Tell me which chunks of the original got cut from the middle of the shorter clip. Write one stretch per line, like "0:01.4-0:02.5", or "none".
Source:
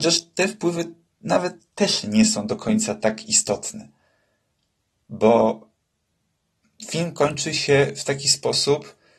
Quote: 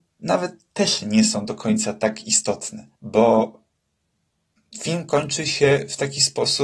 0:04.0-0:05.0